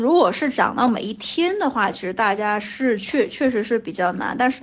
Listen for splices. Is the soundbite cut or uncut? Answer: uncut